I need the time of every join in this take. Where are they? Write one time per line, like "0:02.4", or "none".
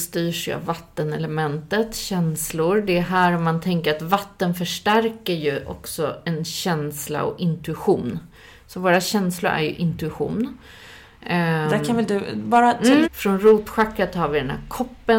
0:13.0